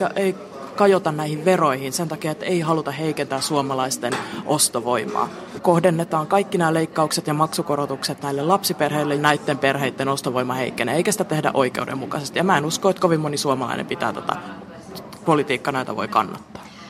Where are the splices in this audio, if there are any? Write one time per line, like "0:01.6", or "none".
0:05.6
0:09.2